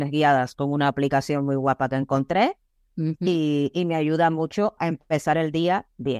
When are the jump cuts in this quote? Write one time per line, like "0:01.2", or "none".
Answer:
0:04.8